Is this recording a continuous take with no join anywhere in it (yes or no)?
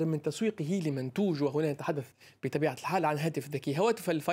yes